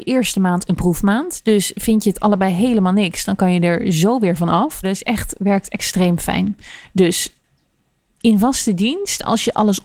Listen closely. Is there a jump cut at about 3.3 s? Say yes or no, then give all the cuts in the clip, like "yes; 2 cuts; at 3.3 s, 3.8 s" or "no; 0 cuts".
no; 1 cut; at 4.8 s